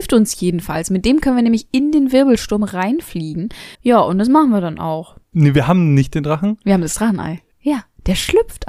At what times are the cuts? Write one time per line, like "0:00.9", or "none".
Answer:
0:03.7
0:05.2
0:07.5